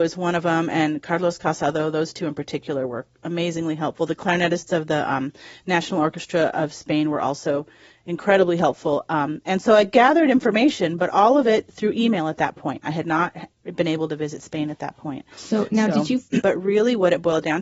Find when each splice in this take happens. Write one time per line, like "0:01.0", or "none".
0:15.3
0:16.4

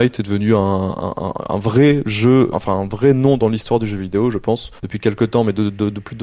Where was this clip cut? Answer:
0:02.5
0:04.8

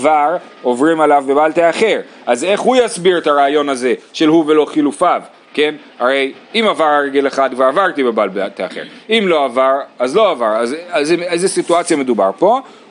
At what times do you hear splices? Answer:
none

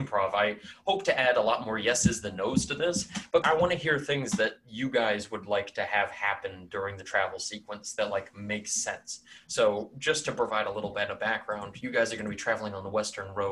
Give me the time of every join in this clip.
0:03.4

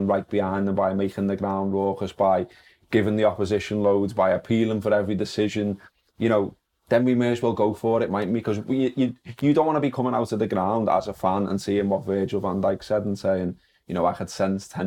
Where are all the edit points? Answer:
none

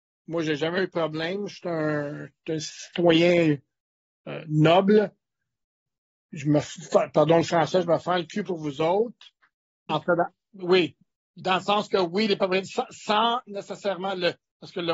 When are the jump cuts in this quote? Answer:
0:09.9
0:11.3

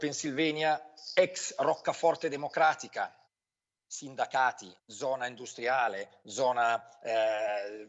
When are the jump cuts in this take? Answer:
none

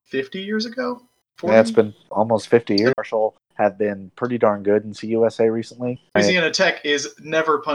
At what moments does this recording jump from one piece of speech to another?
0:02.9
0:06.2

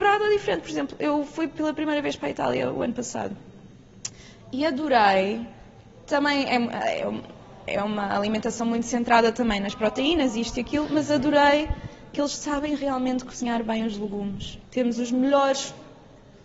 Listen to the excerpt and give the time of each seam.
0:14.6

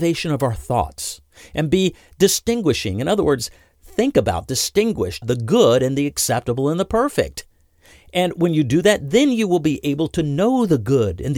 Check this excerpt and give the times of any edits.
0:05.2

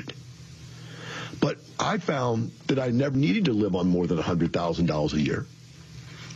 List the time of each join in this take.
0:03.1

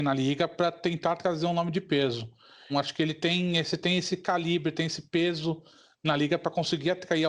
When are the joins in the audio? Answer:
0:02.7

